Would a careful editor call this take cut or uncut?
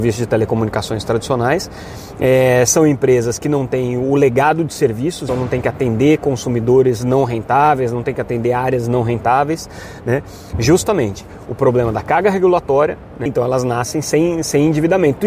cut